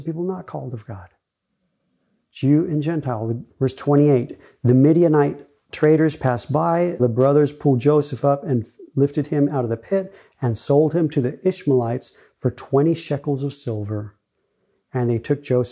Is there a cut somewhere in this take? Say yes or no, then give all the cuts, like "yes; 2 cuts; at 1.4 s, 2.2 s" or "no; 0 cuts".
yes; 2 cuts; at 3.5 s, 7.0 s